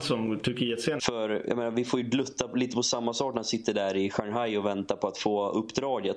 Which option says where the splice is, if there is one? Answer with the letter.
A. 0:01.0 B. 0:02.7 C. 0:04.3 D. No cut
A